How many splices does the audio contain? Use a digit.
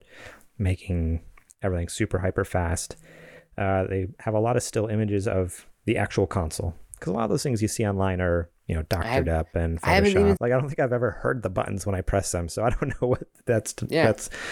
1